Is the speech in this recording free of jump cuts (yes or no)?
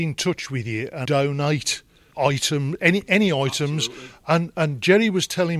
no